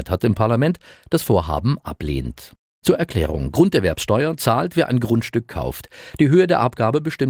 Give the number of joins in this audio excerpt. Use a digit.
0